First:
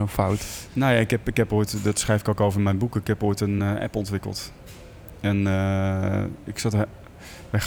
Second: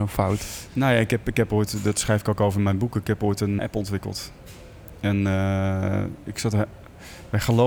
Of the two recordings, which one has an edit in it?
second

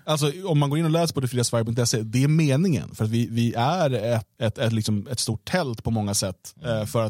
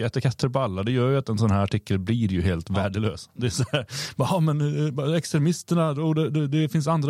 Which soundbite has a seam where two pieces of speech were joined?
first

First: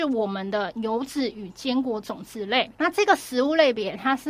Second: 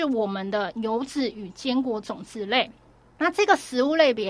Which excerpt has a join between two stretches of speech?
first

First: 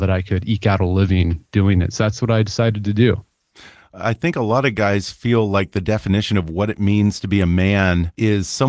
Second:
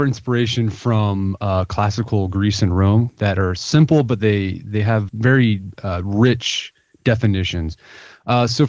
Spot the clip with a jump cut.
second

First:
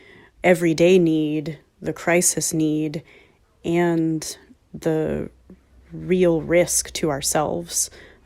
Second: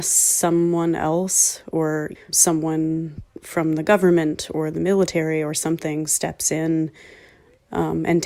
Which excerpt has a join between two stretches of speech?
second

